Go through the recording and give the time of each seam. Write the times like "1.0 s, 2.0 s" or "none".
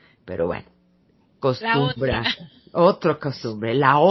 none